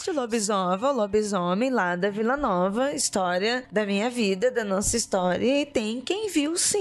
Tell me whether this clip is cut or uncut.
uncut